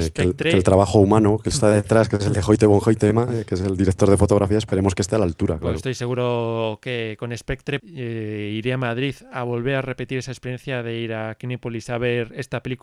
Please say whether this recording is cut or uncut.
cut